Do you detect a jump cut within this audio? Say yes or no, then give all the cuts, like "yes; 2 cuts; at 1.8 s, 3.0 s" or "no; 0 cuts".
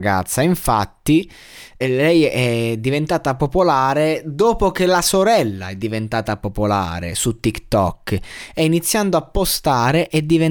yes; 1 cut; at 1.8 s